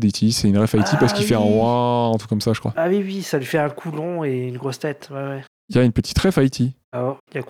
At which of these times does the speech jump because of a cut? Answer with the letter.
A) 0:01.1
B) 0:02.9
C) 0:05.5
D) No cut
C